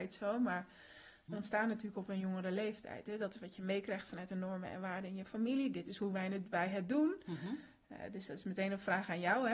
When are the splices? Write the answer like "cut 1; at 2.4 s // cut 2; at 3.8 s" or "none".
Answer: cut 1; at 1.3 s